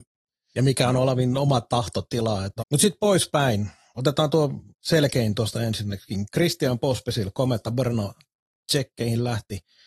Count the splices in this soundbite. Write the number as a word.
two